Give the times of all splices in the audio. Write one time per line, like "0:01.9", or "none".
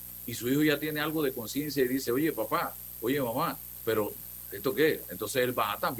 none